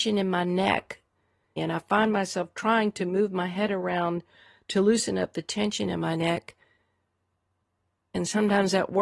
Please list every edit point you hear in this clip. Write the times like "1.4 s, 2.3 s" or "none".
1.6 s